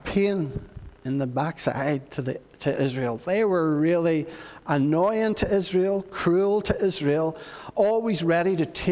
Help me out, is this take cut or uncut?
uncut